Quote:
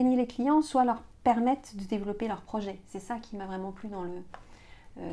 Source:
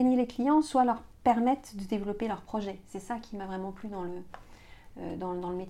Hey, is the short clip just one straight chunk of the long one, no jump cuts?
yes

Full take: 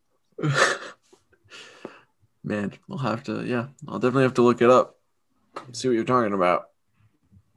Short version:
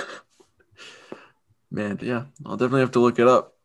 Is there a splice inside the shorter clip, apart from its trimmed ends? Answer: yes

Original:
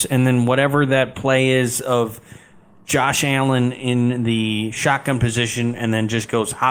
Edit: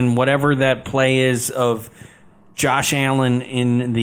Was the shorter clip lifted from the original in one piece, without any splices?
yes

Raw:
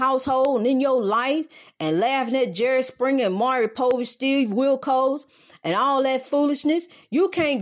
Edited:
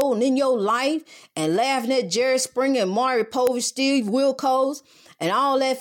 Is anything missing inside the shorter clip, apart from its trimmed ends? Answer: no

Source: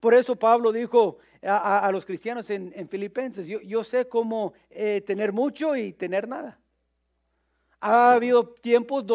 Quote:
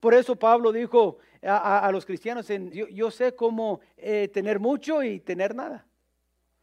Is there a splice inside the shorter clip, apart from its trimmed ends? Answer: yes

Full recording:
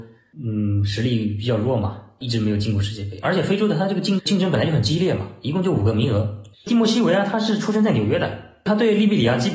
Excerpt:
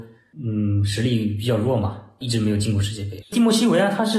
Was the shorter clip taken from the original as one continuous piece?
no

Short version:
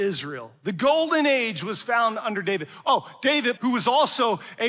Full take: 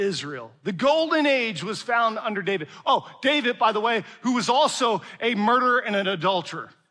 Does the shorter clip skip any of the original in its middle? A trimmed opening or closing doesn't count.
yes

